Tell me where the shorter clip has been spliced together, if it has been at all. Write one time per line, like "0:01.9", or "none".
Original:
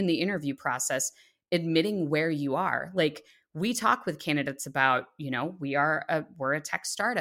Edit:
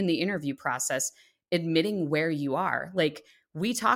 none